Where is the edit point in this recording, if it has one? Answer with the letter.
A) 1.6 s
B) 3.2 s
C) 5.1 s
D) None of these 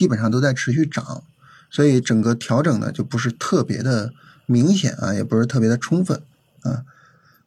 D